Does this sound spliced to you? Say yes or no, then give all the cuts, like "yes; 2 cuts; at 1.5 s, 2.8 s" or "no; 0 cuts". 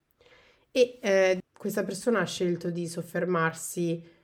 yes; 1 cut; at 1.4 s